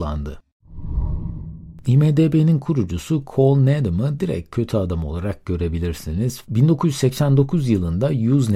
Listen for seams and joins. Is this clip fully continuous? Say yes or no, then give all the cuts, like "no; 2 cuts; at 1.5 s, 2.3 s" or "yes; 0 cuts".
no; 2 cuts; at 1.8 s, 6.4 s